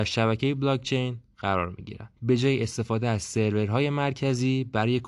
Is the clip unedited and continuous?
no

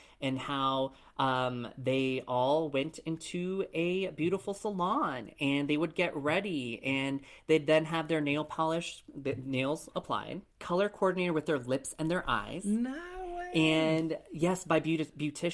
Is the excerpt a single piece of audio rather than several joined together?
no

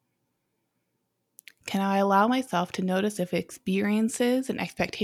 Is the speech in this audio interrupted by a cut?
no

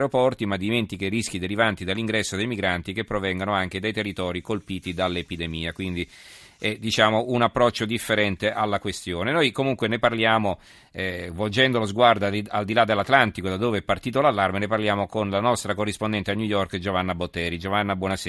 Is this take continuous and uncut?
yes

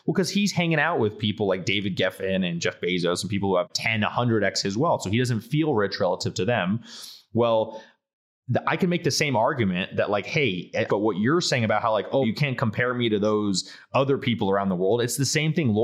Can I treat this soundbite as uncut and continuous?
no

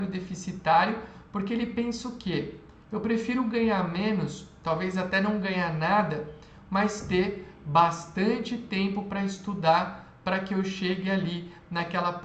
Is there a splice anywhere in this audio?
no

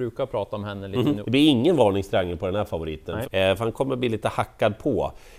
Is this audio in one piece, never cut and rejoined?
no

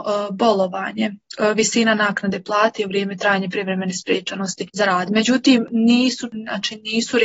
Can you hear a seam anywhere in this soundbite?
no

